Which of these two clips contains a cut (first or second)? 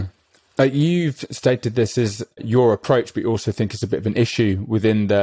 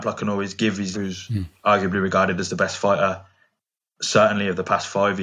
second